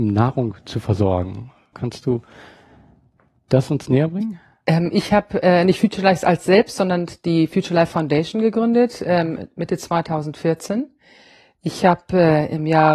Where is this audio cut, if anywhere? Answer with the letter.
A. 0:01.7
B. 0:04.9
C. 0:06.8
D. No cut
A